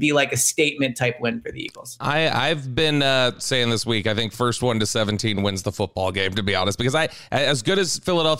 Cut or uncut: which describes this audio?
uncut